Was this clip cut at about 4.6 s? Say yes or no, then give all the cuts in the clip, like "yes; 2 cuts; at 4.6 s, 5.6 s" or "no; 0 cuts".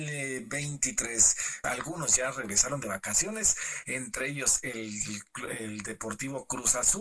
no; 1 cut; at 1.6 s